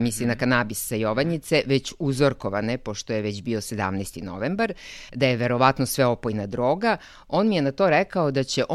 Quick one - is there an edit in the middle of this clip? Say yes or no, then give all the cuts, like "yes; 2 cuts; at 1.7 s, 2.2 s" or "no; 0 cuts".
no; 0 cuts